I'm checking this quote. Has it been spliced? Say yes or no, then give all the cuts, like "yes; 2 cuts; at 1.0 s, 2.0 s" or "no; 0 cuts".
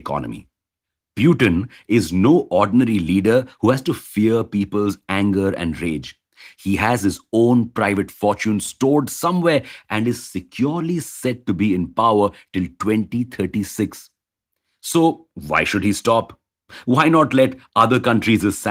no; 0 cuts